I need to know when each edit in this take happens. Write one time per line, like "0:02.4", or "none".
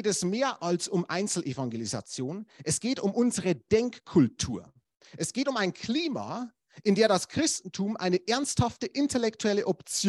none